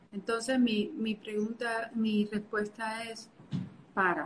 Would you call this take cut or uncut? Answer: uncut